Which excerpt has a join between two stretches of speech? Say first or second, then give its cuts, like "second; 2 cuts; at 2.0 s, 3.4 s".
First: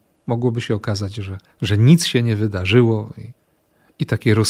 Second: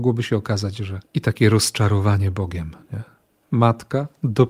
second; 2 cuts; at 1.0 s, 3.4 s